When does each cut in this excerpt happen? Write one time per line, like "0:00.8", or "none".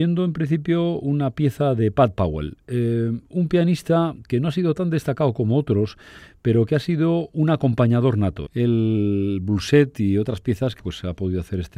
0:08.5
0:10.8